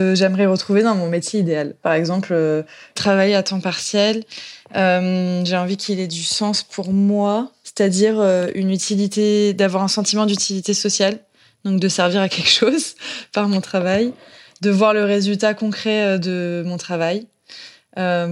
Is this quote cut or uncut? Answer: uncut